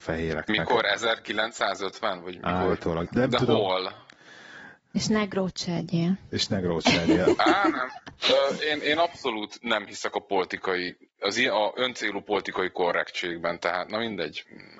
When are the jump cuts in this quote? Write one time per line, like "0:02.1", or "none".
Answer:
0:03.0
0:04.8